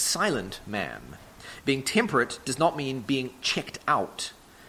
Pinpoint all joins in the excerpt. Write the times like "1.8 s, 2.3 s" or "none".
1.6 s